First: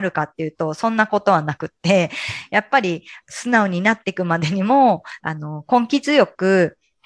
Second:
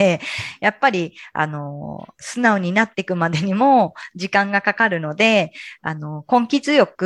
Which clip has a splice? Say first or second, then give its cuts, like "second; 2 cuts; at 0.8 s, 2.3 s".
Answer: first; 2 cuts; at 3.2 s, 5.2 s